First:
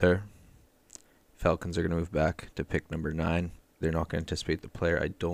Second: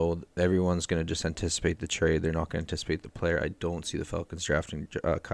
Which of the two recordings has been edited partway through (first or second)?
first